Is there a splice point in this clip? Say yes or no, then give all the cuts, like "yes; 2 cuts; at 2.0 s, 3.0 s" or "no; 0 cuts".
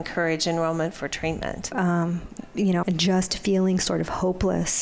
yes; 2 cuts; at 1.7 s, 2.8 s